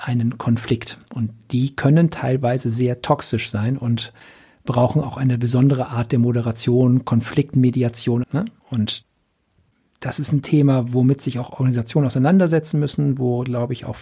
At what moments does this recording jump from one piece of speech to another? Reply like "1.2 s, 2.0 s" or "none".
8.2 s